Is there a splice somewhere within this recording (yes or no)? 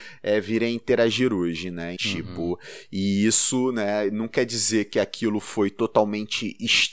yes